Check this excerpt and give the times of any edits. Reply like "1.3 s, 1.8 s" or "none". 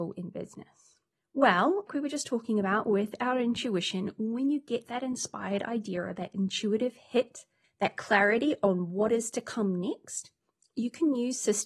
1.9 s